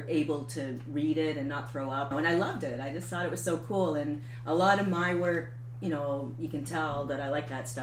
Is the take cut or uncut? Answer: cut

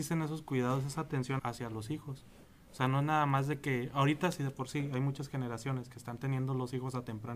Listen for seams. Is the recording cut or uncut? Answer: cut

